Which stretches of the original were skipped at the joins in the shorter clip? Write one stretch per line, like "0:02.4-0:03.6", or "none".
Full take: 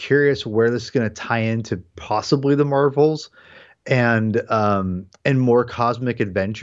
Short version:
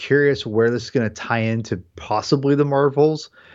none